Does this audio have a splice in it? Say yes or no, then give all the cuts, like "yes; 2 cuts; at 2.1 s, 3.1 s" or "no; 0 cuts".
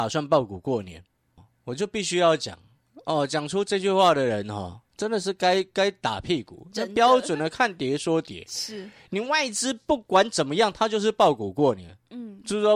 no; 0 cuts